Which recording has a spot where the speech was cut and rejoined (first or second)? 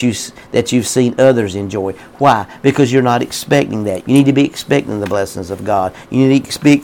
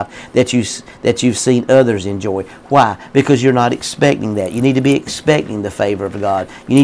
first